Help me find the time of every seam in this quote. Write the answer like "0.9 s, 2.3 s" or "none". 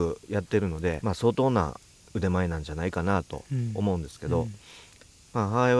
1.0 s

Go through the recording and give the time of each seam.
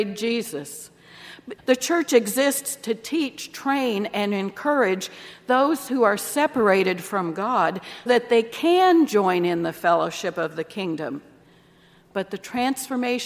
1.6 s, 8.1 s

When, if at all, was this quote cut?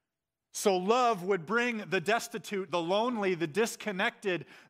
none

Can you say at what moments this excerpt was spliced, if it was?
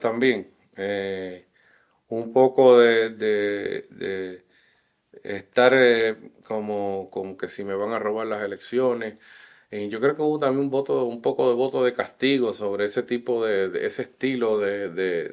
7.4 s

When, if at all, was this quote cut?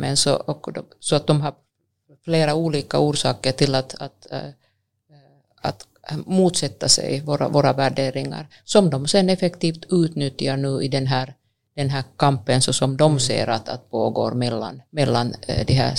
14.9 s

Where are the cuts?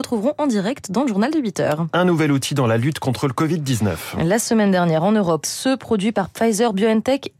5.4 s

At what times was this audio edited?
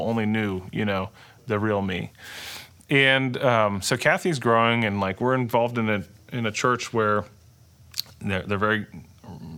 none

